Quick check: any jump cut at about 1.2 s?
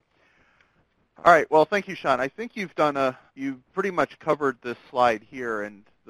no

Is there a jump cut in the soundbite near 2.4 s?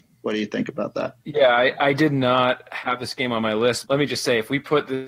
no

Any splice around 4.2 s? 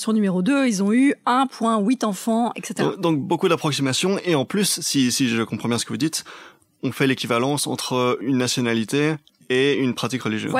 no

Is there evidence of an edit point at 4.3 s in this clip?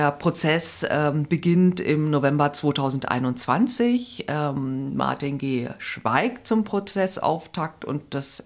no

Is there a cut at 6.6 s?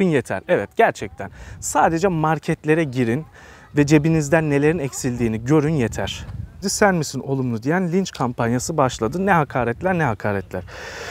yes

